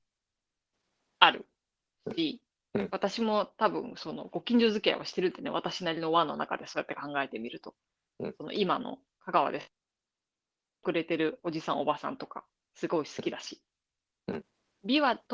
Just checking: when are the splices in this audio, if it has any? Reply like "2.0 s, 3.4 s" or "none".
none